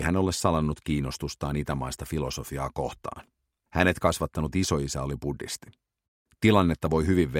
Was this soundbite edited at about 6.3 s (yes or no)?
yes